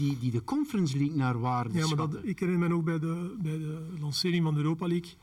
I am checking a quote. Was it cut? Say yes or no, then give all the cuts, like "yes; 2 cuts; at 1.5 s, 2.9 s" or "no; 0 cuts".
no; 0 cuts